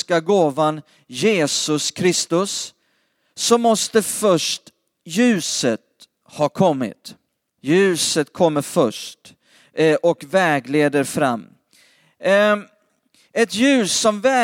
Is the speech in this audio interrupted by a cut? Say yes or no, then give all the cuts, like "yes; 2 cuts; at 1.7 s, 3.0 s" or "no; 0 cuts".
yes; 1 cut; at 7.5 s